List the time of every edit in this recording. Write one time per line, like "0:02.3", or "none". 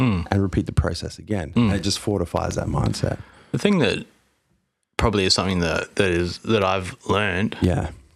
none